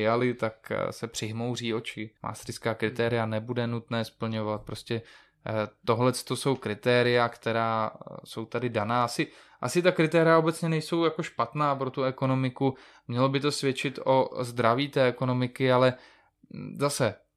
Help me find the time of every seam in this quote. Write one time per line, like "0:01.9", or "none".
0:02.2